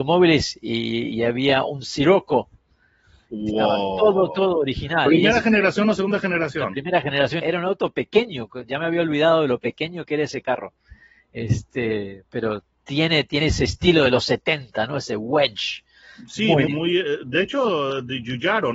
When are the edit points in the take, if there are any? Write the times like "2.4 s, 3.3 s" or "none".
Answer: 7.4 s, 16.7 s